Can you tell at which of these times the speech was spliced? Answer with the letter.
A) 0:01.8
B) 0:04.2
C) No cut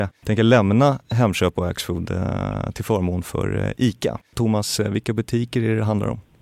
C